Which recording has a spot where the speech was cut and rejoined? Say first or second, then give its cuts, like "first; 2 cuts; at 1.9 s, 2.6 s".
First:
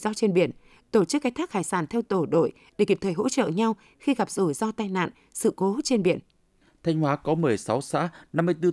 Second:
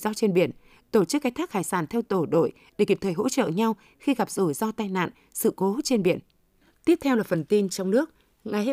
second; 1 cut; at 6.7 s